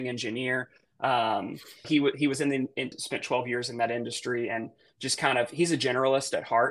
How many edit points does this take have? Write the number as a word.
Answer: two